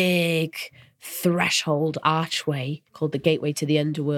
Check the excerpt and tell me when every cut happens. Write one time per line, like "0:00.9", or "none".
0:02.9